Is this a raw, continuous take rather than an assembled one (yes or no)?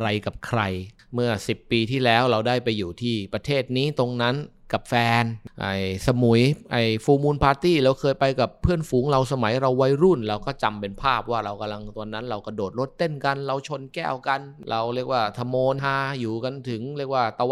no